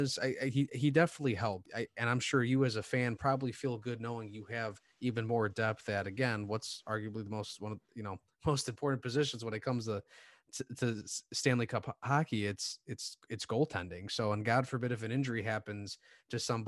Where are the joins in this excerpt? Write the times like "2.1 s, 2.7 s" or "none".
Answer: 1.7 s